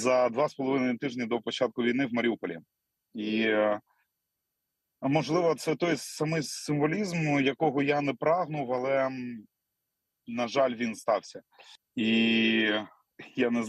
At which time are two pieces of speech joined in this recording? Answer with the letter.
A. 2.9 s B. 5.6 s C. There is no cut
C